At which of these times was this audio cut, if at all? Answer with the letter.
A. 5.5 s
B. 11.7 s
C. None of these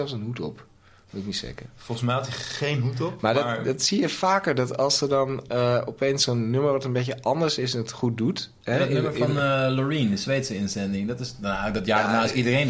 C